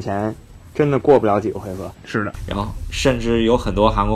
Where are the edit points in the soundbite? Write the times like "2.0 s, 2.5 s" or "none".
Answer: 1.9 s

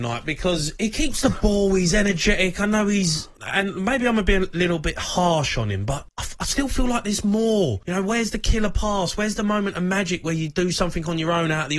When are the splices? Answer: none

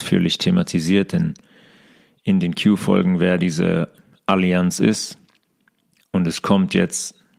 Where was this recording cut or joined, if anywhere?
none

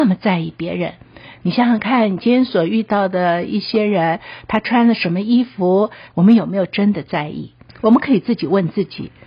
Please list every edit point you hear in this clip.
6.1 s, 7.7 s

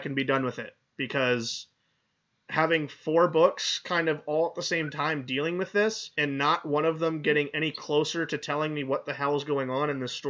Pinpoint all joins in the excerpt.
none

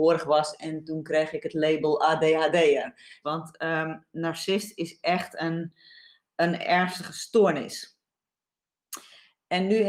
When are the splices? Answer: 3.2 s

